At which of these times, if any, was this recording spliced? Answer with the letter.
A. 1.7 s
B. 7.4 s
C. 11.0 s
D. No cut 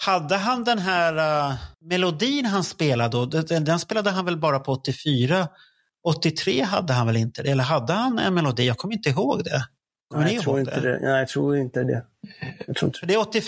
A